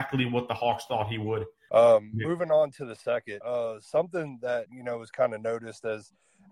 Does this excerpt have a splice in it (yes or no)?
yes